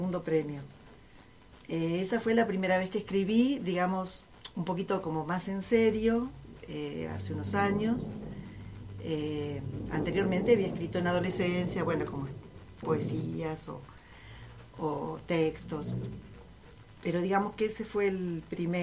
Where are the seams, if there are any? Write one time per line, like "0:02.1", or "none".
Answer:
0:12.8